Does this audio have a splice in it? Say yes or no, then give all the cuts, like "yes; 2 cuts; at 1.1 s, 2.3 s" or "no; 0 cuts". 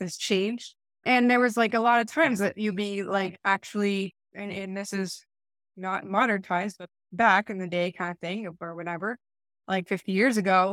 yes; 1 cut; at 1.0 s